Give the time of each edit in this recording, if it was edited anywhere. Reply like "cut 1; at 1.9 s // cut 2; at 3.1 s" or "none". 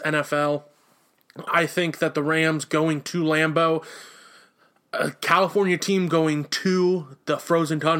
cut 1; at 1.5 s